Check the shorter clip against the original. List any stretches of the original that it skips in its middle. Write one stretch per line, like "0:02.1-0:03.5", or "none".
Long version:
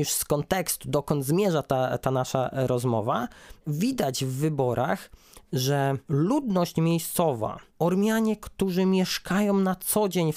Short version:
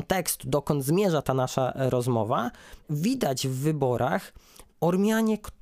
0:01.6-0:02.0
0:05.5-0:07.7